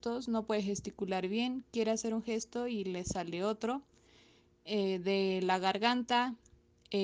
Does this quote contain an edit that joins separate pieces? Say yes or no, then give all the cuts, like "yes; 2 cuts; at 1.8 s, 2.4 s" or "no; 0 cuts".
no; 0 cuts